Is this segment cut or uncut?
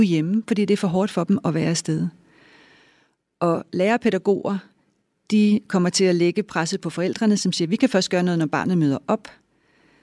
uncut